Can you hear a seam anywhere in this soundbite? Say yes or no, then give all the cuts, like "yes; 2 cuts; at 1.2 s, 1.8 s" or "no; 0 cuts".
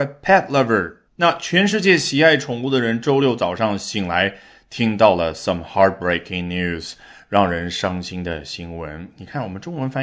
yes; 1 cut; at 1.1 s